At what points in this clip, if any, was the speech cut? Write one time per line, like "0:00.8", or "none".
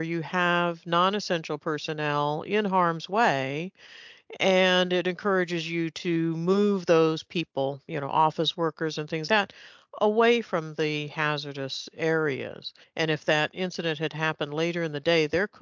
0:09.3
0:12.8